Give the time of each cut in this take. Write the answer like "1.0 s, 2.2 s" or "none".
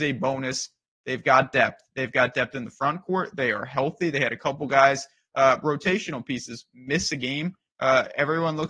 none